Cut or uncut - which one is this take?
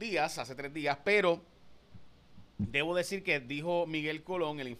uncut